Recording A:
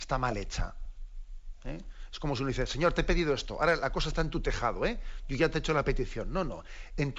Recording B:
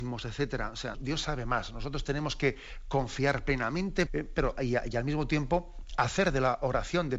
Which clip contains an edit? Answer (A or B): B